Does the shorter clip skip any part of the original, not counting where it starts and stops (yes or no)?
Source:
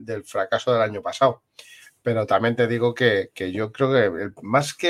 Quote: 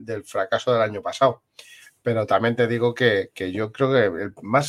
no